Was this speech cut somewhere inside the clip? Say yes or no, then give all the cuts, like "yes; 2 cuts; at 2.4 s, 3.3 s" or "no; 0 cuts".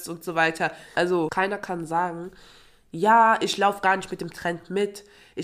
yes; 1 cut; at 0.9 s